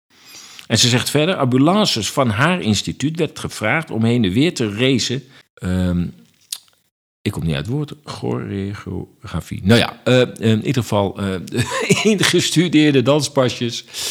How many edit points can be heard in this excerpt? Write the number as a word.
one